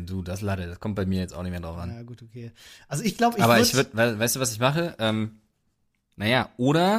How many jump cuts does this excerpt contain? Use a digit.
0